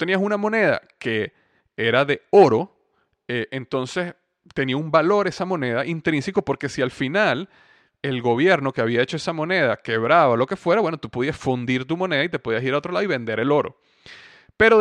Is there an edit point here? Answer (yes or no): no